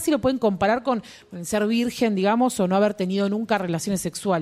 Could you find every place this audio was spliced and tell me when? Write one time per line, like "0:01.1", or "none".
none